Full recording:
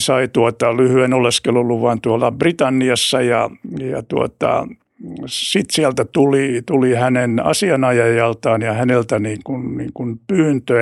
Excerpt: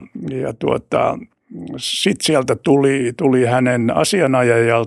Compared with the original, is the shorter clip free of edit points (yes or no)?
yes